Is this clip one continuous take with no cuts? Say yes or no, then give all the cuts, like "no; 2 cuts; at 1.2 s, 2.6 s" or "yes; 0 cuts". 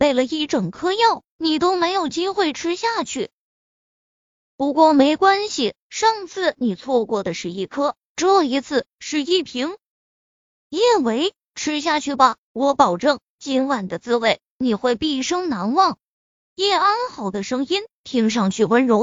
yes; 0 cuts